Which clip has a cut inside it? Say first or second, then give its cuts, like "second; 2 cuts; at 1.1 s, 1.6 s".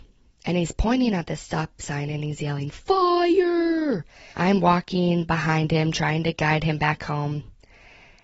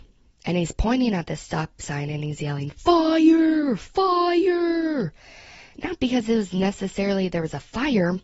first; 2 cuts; at 2.7 s, 4.3 s